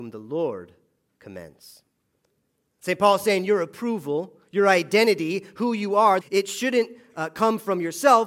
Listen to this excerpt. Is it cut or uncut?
cut